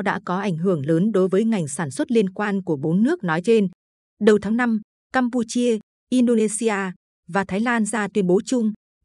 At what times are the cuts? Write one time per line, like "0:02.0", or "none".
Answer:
none